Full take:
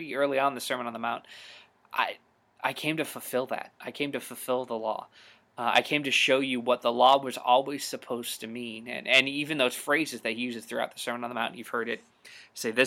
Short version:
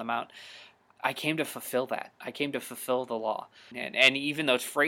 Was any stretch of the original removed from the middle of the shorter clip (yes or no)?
yes